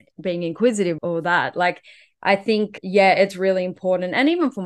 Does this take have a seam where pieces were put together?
yes; 2 cuts; at 1.0 s, 2.8 s

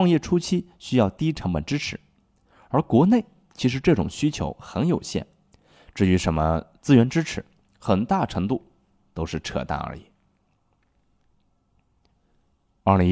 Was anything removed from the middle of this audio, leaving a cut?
no; 0 cuts

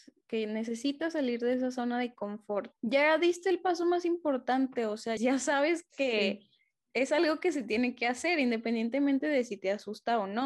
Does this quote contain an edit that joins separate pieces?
yes; 2 cuts; at 2.8 s, 5.2 s

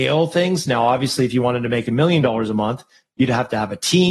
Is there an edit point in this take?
no; 0 cuts

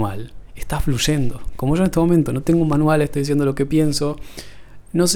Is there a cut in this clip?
no; 0 cuts

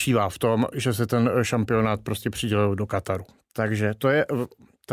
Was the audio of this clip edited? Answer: yes; 1 cut; at 3.4 s

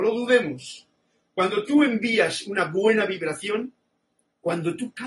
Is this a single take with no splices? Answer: yes; 0 cuts

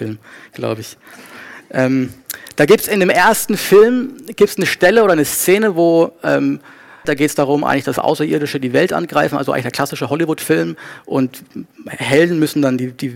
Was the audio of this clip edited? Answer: yes; 1 cut; at 7.0 s

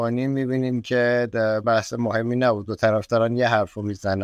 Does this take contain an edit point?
yes; 1 cut; at 1.6 s

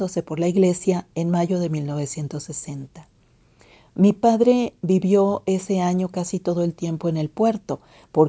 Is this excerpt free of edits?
yes; 0 cuts

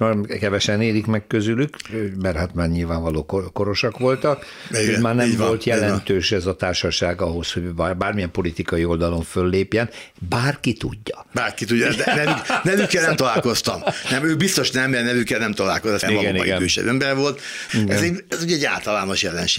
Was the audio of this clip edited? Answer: yes; 2 cuts; at 16.0 s, 17.7 s

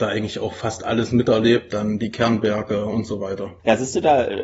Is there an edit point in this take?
yes; 1 cut; at 1.7 s

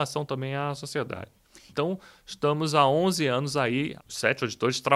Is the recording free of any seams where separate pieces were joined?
no; 2 cuts; at 1.7 s, 4.0 s

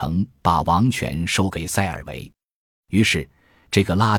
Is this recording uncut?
yes; 0 cuts

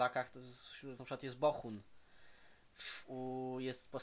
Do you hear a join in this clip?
yes; 1 cut; at 1.0 s

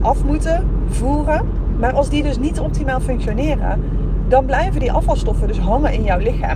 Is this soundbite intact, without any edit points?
yes; 0 cuts

